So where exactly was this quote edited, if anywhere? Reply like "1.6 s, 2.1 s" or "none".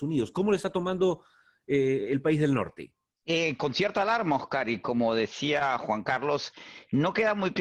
none